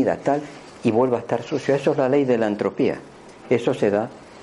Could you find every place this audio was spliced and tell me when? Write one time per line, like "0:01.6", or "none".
none